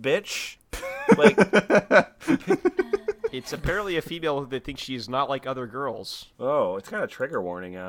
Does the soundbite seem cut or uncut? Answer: cut